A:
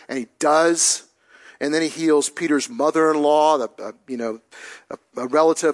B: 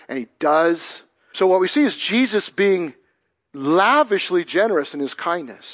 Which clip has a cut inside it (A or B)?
B